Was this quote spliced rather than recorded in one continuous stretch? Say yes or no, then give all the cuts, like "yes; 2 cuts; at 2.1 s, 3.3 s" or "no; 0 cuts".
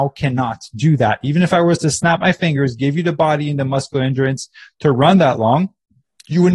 no; 0 cuts